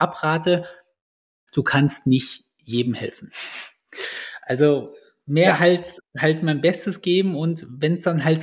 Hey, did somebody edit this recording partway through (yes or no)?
yes